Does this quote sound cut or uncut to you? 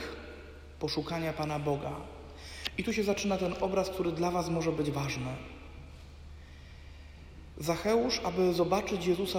uncut